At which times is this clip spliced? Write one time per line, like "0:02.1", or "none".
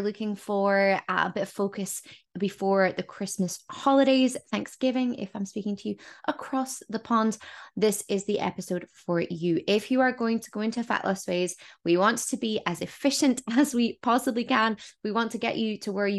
none